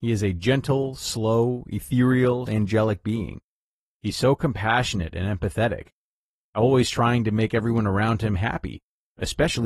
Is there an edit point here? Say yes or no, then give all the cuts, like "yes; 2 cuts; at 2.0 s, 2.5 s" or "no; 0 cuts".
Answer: yes; 1 cut; at 2.5 s